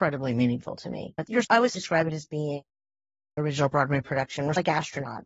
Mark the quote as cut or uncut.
cut